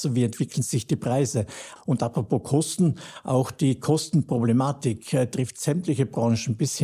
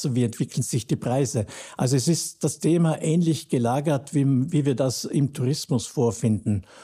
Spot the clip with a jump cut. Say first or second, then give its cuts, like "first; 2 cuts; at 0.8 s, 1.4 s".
first; 1 cut; at 1.8 s